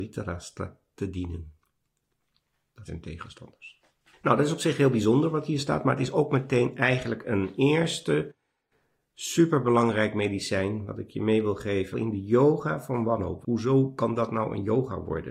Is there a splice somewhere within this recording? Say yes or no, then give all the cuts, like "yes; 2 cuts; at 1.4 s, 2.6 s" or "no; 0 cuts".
yes; 3 cuts; at 2.9 s, 11.9 s, 13.4 s